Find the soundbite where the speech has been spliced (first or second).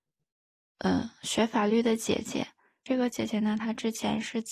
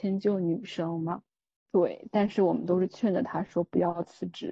second